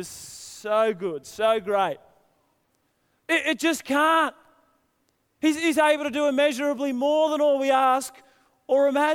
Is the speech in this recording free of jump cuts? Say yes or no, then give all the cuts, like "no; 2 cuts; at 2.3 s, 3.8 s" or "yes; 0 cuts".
no; 1 cut; at 3.2 s